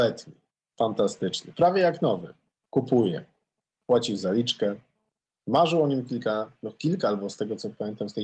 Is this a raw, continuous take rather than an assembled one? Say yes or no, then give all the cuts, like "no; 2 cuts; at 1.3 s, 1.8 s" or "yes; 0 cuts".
yes; 0 cuts